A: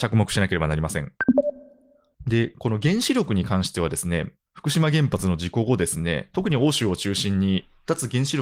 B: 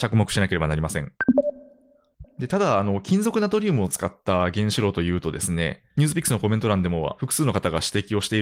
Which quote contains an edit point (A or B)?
B